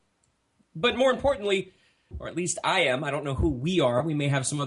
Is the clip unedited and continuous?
no; 1 cut; at 2.1 s

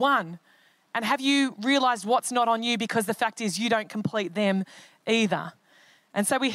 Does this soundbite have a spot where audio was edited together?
no; 0 cuts

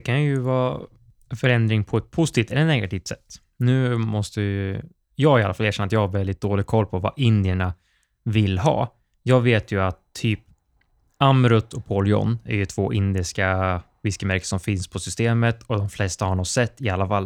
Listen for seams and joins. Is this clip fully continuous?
yes; 0 cuts

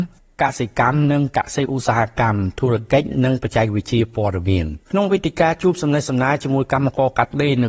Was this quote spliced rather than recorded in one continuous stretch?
yes; 1 cut; at 4.8 s

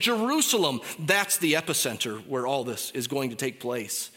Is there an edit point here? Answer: no; 0 cuts

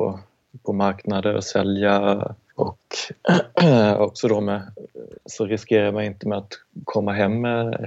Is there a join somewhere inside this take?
yes; 2 cuts; at 2.5 s, 5.2 s

